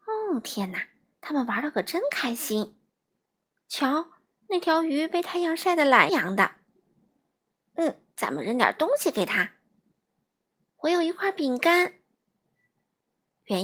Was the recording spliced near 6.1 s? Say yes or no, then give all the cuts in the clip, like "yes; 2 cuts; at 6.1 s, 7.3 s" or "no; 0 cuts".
yes; 1 cut; at 6.1 s